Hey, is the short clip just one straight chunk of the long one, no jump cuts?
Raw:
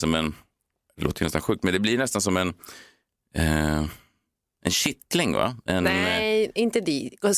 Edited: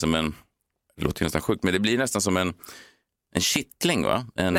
no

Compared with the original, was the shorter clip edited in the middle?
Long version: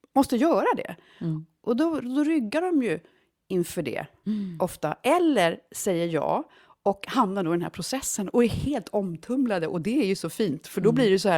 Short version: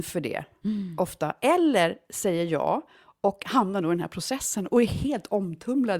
no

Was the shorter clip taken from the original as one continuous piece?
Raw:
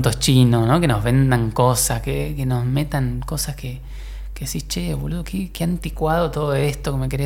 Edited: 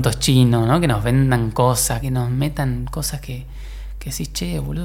no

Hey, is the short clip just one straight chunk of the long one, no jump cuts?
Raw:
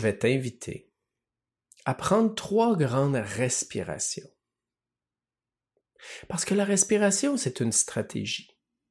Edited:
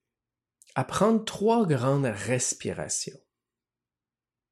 yes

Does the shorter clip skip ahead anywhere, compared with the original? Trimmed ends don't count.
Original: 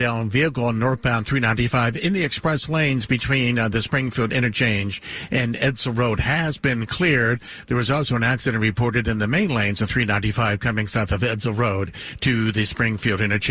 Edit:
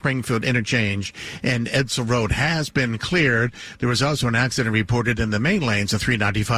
no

